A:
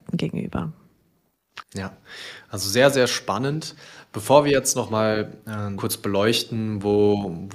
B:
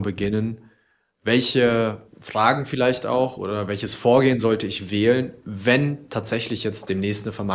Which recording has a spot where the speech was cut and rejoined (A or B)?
A